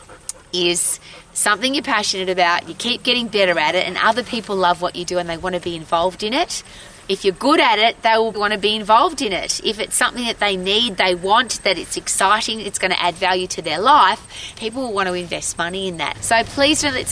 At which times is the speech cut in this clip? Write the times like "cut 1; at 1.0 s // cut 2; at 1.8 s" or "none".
cut 1; at 8.3 s // cut 2; at 14.6 s // cut 3; at 16.1 s